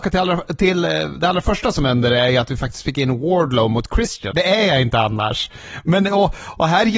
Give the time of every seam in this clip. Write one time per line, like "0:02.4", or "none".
0:04.3